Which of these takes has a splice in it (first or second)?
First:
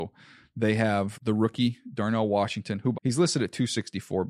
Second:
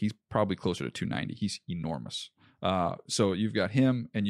first